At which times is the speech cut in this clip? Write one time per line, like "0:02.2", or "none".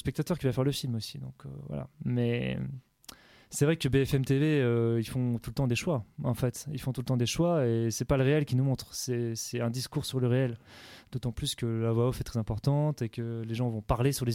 none